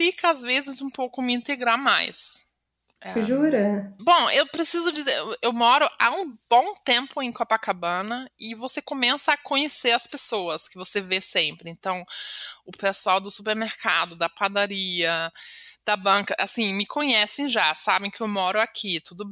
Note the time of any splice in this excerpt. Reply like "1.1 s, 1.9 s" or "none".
4.0 s